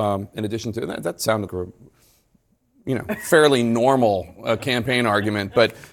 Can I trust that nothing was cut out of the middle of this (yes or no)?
no